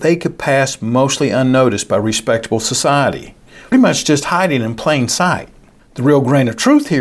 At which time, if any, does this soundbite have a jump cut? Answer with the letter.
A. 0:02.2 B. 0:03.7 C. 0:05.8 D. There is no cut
B